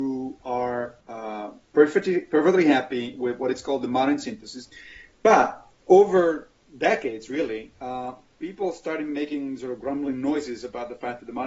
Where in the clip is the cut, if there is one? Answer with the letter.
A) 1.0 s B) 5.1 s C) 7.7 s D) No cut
A